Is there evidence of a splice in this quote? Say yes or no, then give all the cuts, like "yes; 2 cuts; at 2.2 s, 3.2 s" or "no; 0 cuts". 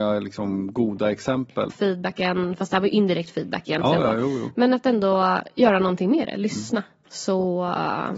yes; 2 cuts; at 1.7 s, 7.0 s